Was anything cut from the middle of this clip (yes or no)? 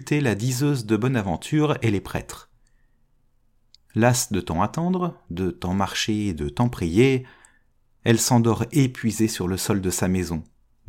yes